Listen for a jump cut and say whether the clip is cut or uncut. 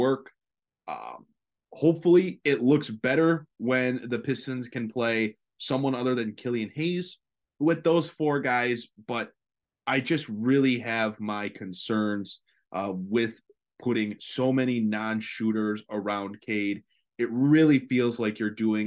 uncut